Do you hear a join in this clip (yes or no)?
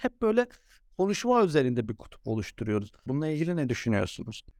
yes